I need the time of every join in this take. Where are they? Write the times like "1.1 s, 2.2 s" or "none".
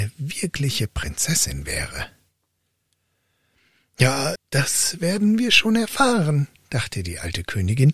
4.4 s